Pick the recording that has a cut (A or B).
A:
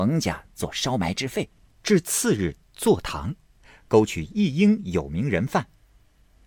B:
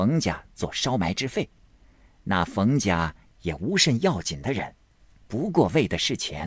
A